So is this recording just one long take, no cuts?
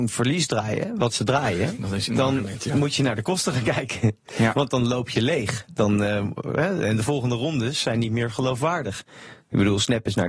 yes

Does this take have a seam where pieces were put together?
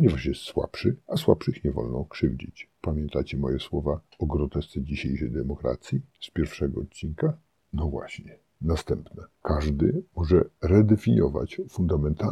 no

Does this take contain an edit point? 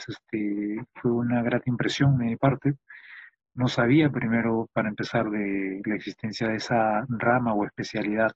no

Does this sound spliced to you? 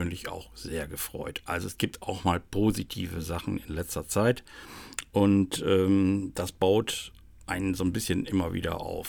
no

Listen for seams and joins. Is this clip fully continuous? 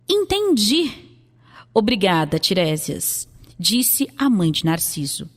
yes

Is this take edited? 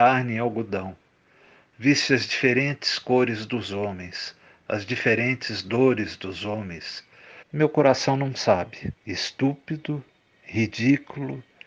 yes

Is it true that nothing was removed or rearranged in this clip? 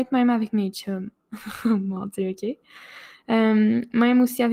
yes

